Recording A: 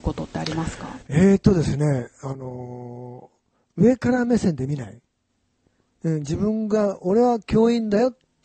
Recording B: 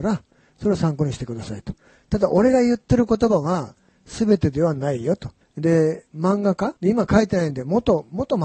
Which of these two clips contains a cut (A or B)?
B